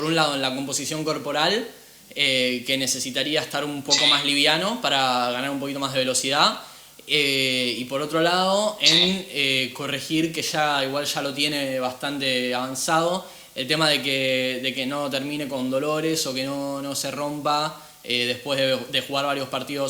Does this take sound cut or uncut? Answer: uncut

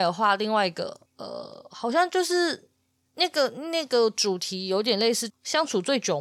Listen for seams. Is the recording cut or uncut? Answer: cut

